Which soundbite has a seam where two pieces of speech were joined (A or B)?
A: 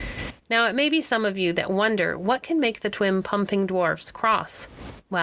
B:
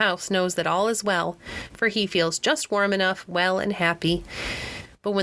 B